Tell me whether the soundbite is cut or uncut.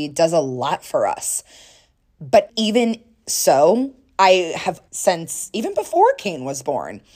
cut